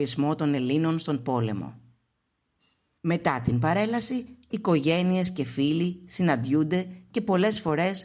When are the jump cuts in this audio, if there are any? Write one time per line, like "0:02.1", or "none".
0:03.0